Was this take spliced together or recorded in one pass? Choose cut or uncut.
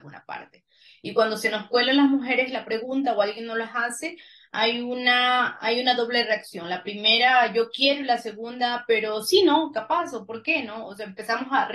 uncut